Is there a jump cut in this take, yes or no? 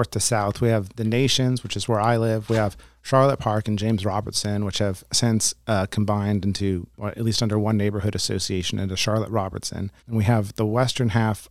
yes